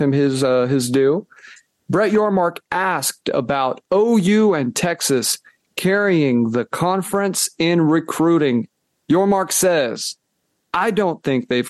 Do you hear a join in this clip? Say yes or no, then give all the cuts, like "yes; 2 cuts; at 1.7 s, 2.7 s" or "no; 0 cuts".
no; 0 cuts